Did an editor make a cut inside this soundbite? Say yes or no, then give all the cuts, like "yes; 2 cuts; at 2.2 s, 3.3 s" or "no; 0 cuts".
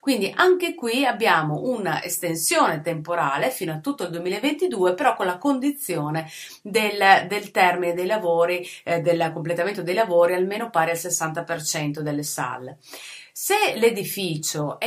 no; 0 cuts